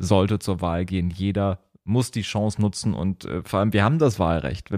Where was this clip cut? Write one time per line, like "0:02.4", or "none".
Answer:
none